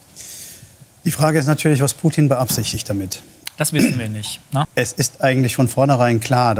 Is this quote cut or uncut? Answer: cut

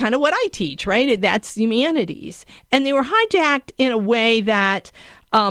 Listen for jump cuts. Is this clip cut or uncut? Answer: cut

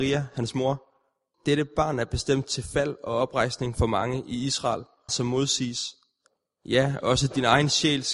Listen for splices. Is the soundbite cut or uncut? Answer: cut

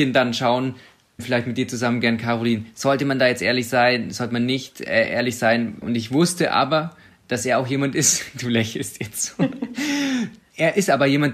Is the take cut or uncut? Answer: cut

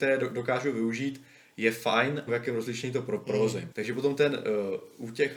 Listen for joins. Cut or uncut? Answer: cut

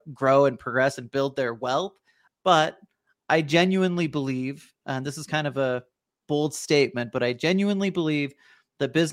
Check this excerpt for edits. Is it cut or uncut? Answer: cut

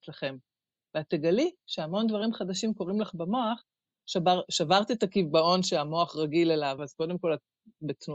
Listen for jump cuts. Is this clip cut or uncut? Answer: cut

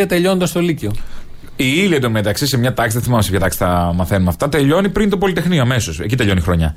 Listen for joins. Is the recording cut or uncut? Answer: uncut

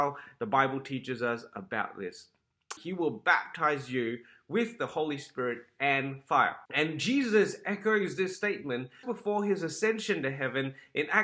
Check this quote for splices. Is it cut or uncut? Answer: cut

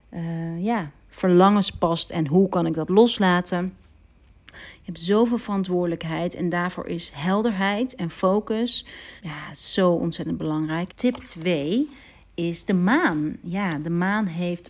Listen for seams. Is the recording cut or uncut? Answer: cut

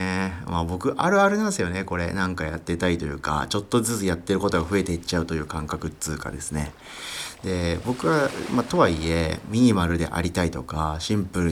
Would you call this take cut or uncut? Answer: uncut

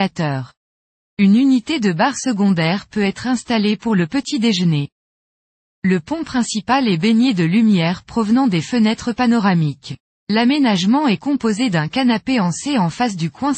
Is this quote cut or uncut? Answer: uncut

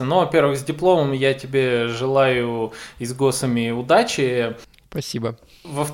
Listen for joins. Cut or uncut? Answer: uncut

